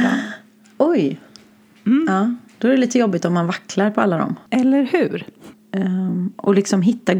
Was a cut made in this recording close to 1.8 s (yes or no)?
no